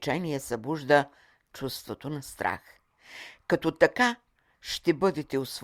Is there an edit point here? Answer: no; 0 cuts

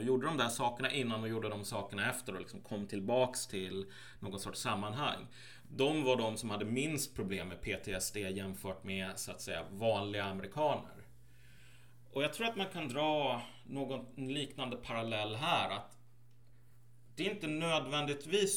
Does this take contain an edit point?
no; 0 cuts

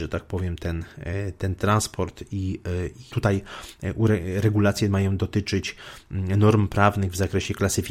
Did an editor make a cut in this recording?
yes; 1 cut; at 3.1 s

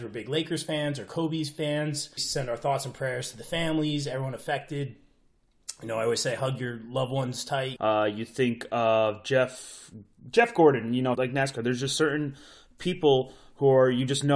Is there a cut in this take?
yes; 3 cuts; at 2.2 s, 7.8 s, 11.1 s

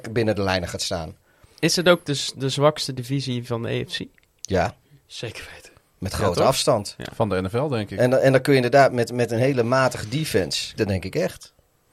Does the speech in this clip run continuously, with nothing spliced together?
no; 2 cuts; at 8.9 s, 10.8 s

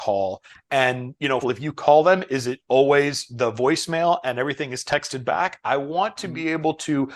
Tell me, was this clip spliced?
yes; 1 cut; at 1.4 s

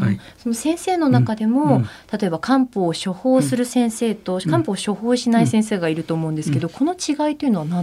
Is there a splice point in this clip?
no; 0 cuts

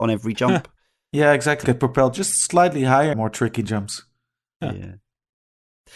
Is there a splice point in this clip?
yes; 2 cuts; at 1.6 s, 3.1 s

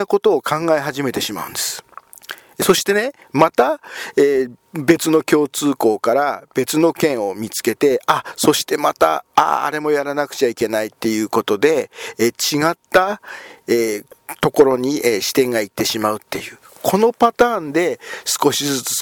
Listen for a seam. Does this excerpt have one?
no; 0 cuts

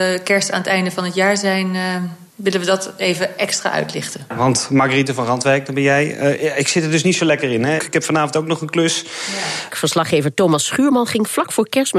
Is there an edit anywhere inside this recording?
yes; 3 cuts; at 2.3 s, 7.8 s, 9.7 s

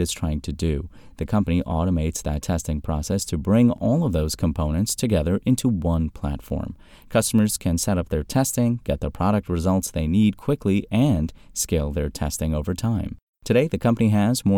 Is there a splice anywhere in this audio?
no; 0 cuts

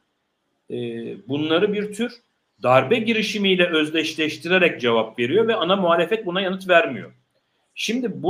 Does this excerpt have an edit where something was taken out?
no; 0 cuts

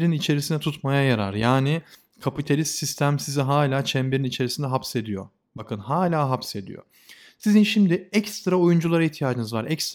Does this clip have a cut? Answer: no; 0 cuts

